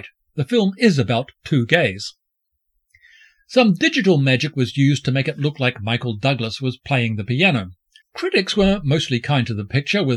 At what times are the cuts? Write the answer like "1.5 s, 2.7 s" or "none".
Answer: 8.0 s